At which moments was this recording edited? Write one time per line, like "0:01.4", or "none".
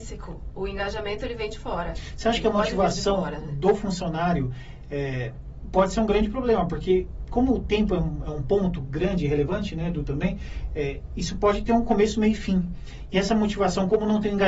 none